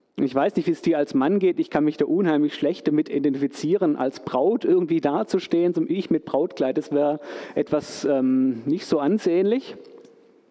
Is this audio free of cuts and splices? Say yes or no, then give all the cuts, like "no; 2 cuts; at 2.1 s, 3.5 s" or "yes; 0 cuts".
yes; 0 cuts